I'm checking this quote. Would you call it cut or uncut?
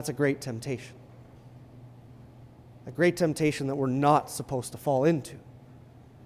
uncut